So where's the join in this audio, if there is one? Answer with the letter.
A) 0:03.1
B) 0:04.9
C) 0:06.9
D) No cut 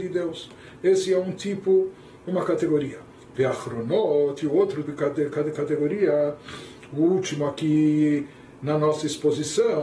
B